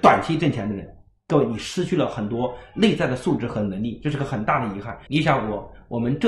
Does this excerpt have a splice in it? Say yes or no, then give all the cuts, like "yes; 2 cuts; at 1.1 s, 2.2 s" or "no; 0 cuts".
yes; 1 cut; at 5.1 s